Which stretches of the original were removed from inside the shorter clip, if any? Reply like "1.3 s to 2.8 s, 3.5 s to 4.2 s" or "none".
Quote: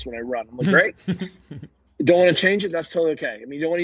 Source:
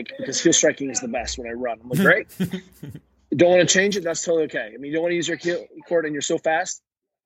none

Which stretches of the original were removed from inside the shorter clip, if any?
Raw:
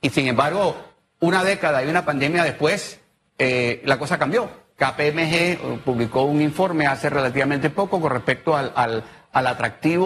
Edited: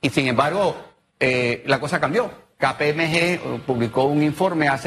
1.1 s to 3.2 s

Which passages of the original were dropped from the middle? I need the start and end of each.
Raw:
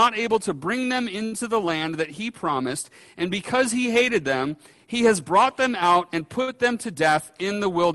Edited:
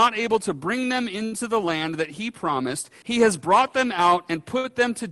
3.0 s to 4.9 s

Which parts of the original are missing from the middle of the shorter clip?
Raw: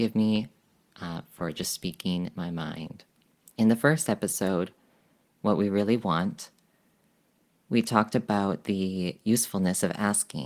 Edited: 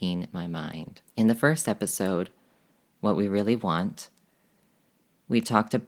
3.1 s to 3.5 s

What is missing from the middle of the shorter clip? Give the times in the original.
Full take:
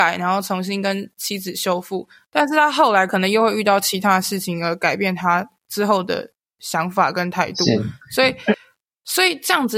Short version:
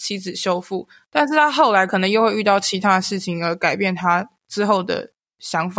none

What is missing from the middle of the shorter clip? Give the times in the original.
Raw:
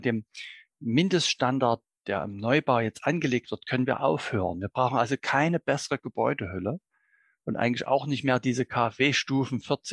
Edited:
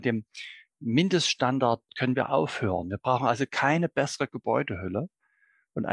1.9 s to 3.6 s

